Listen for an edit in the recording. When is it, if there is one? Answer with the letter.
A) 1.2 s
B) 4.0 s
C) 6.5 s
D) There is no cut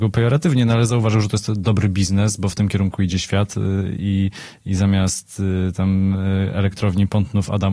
D